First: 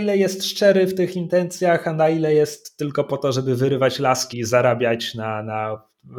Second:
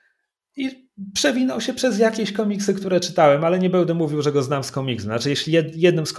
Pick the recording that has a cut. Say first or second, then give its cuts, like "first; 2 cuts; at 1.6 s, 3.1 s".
first; 1 cut; at 4.3 s